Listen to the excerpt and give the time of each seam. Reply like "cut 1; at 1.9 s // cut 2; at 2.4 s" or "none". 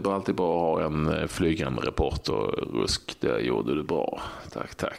none